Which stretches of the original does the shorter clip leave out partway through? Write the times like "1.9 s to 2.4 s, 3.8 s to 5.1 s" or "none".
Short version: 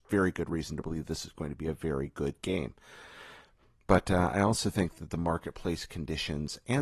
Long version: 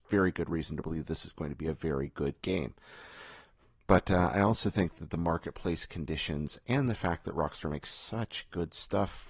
none